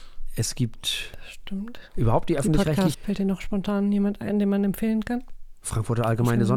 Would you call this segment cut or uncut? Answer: cut